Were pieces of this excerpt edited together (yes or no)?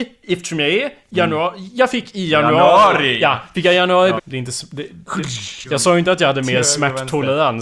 yes